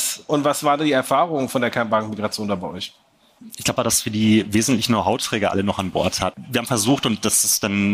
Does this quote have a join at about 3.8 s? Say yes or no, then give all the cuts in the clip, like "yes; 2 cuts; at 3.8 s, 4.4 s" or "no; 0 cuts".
yes; 2 cuts; at 3.8 s, 6.3 s